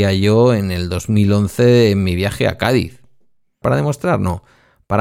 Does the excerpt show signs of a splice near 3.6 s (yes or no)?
yes